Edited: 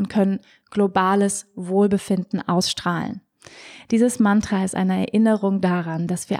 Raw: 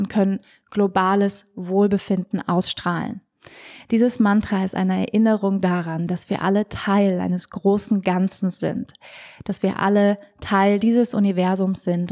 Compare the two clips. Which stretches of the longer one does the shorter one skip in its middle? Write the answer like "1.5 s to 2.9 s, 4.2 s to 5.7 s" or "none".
none